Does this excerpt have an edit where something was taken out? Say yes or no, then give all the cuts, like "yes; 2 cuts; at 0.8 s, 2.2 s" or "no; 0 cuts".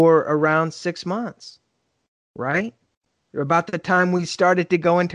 no; 0 cuts